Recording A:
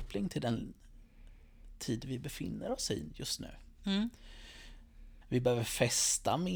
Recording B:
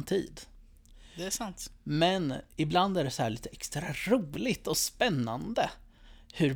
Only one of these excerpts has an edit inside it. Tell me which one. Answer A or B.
A